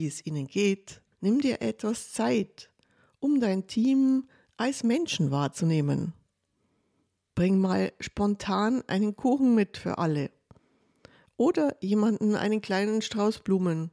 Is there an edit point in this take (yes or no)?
yes